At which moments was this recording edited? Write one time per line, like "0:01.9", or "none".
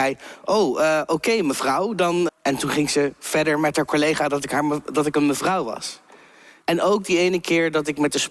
0:02.3
0:06.6